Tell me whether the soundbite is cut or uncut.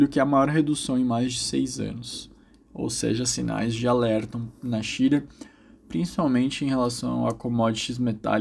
uncut